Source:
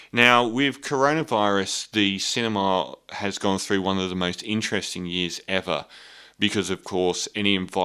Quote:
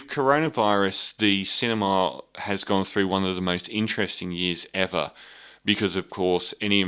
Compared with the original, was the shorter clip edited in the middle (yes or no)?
no